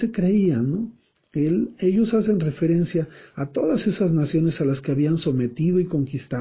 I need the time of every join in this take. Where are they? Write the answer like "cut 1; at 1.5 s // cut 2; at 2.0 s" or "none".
cut 1; at 1.2 s